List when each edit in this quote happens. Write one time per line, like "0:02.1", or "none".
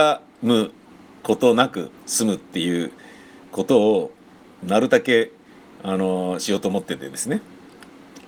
0:02.0